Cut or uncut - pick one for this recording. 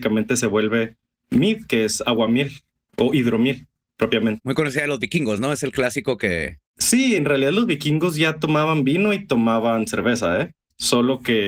uncut